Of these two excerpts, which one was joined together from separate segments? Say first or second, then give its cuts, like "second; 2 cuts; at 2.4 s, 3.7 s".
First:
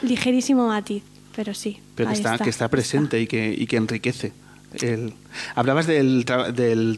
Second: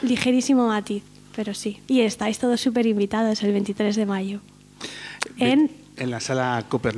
second; 2 cuts; at 1.9 s, 6.0 s